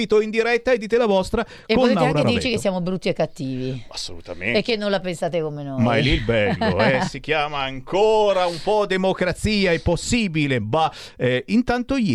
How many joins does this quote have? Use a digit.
0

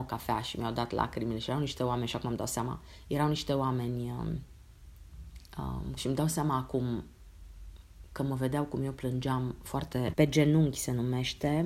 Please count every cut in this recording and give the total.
2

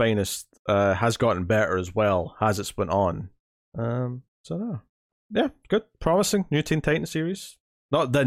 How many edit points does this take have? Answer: 2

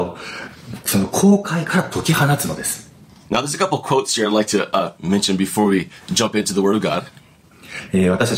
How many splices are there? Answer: 0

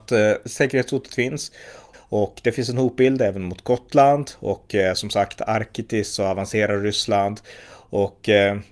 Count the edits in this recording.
1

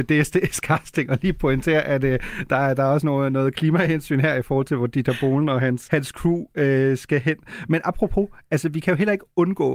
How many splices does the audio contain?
1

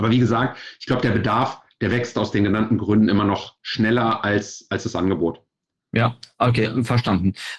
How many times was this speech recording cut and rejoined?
0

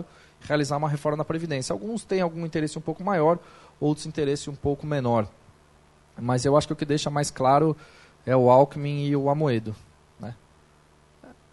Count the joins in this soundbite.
0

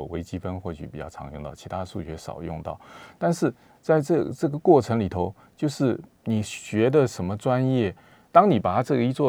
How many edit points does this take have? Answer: 1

